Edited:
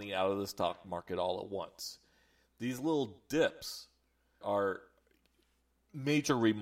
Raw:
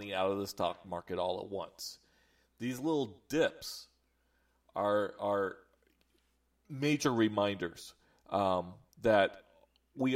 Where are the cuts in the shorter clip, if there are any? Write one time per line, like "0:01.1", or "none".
0:04.4